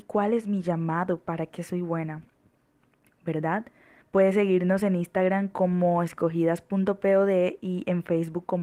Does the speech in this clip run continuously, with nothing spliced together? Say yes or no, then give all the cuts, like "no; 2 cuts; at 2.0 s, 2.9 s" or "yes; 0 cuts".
no; 1 cut; at 4.0 s